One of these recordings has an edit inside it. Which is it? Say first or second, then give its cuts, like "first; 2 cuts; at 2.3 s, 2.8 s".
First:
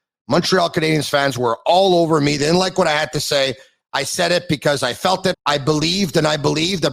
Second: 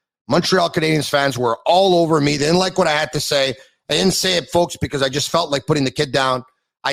first; 2 cuts; at 3.8 s, 5.3 s